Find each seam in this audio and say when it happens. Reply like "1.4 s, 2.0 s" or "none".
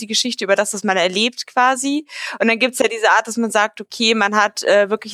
none